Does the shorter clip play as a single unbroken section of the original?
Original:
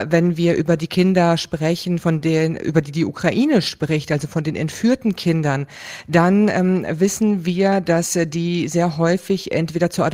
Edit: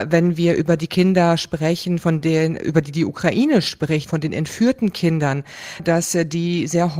no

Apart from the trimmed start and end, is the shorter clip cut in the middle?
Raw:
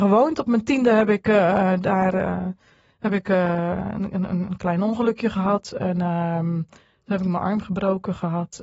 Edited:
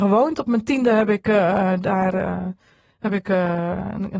no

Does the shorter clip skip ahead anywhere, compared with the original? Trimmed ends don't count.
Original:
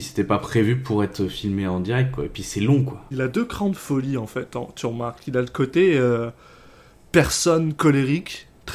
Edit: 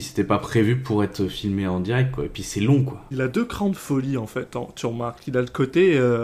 no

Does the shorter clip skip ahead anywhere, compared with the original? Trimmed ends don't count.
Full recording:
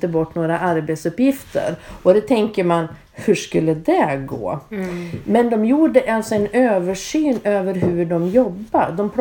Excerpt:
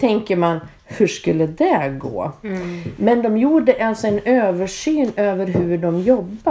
no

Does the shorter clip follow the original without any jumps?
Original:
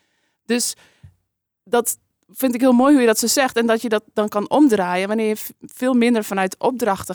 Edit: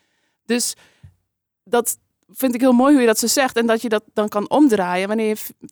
yes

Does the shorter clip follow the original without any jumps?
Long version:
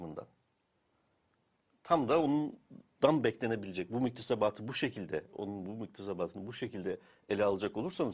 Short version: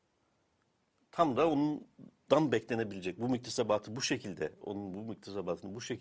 yes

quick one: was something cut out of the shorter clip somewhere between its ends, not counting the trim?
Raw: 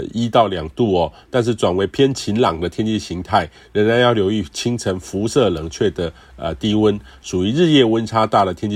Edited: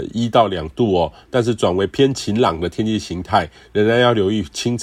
no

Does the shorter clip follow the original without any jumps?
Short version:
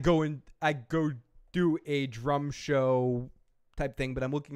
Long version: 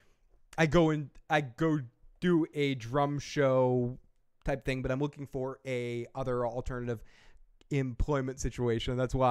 yes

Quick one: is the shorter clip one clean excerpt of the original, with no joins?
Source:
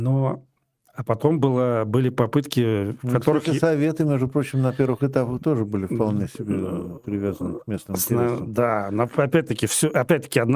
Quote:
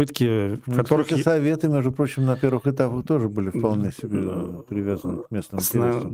yes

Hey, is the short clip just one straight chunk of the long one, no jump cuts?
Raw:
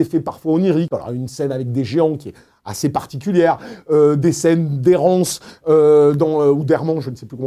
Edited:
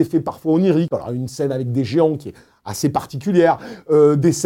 yes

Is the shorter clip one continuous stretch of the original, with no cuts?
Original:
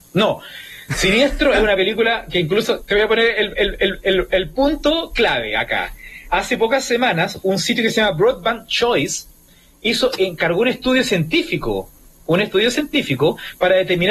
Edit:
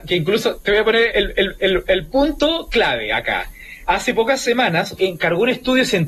no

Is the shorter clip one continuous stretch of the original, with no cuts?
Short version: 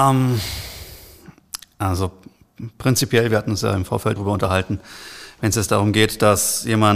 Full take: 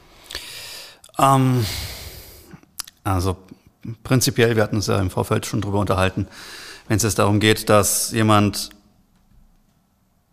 no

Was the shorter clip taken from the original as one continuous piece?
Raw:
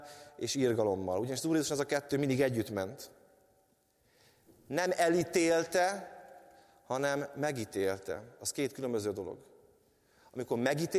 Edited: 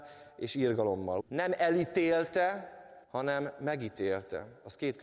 no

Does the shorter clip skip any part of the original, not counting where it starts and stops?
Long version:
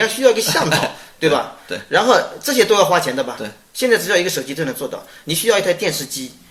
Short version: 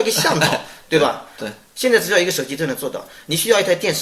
yes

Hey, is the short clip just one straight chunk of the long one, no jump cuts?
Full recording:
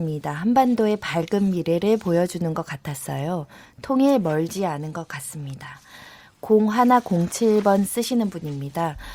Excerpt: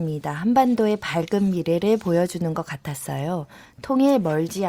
yes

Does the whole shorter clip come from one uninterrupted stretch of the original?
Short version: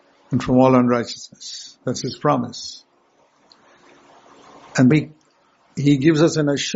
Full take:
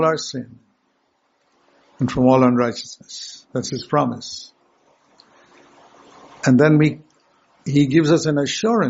no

